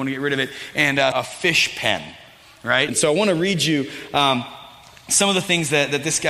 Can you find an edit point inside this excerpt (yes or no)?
yes